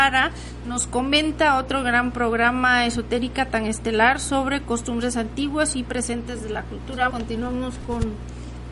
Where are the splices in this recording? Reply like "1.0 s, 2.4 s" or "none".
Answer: 7.1 s